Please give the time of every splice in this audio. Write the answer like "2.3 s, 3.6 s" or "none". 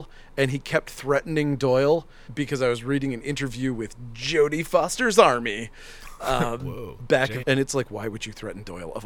2.2 s, 7.4 s